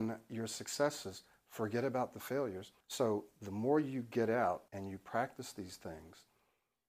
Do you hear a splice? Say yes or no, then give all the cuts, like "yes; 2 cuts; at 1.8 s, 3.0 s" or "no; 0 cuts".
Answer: yes; 2 cuts; at 2.8 s, 4.7 s